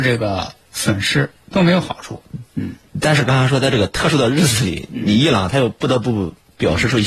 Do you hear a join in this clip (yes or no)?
no